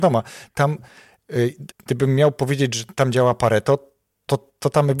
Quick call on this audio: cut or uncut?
cut